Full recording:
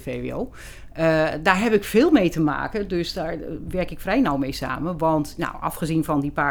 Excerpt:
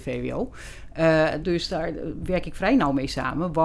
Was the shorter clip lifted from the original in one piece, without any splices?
no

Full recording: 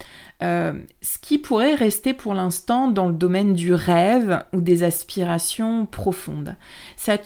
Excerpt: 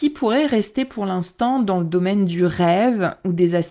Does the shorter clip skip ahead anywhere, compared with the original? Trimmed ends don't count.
no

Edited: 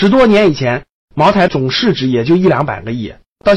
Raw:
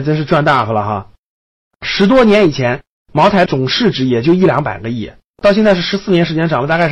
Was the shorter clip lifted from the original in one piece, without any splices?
yes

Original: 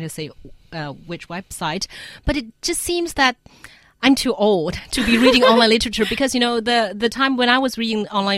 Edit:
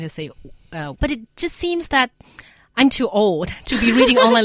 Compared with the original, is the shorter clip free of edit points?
no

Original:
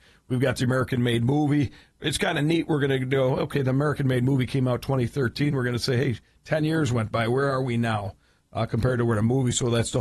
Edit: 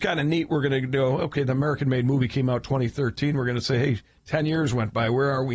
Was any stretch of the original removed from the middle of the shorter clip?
no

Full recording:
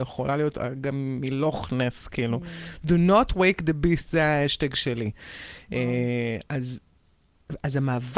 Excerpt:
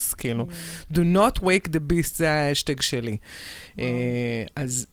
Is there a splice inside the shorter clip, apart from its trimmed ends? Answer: no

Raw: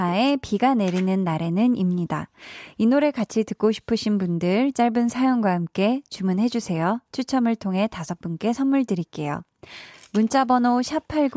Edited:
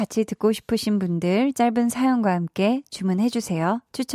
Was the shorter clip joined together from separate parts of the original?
no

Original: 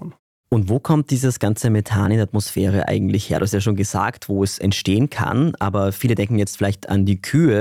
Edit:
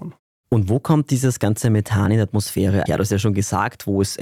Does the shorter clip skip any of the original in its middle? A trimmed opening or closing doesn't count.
yes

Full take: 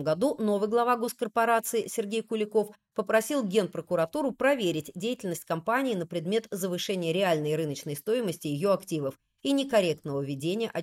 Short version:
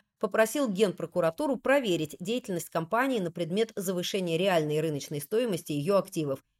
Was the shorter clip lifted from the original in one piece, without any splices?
yes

